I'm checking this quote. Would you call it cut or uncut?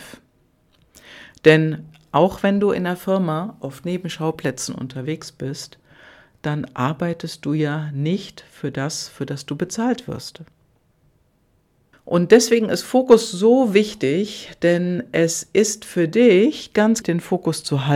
cut